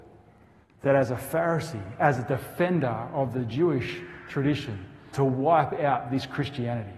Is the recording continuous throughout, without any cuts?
no; 1 cut; at 5.1 s

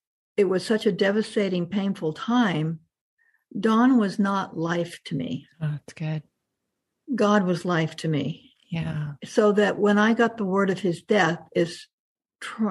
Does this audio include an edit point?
no; 0 cuts

